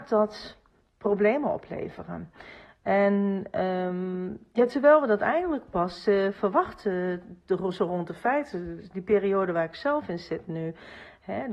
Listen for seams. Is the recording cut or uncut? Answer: uncut